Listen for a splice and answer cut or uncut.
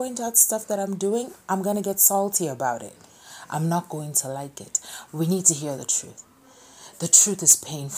cut